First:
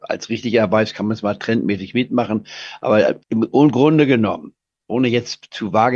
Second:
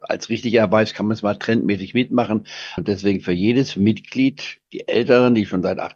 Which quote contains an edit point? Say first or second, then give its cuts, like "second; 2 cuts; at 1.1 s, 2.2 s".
second; 1 cut; at 2.8 s